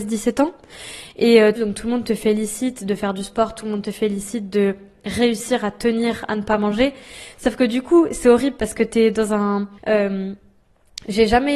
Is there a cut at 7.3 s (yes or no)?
no